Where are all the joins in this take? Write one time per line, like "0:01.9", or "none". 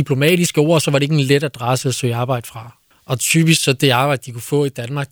0:02.9